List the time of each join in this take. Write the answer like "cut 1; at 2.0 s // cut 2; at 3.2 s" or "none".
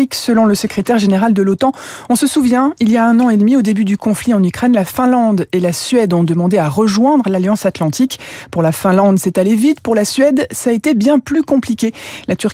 none